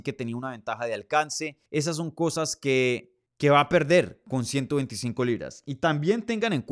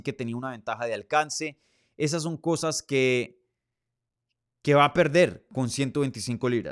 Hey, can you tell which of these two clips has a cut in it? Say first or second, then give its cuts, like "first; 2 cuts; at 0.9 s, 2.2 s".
first; 2 cuts; at 1.7 s, 3.3 s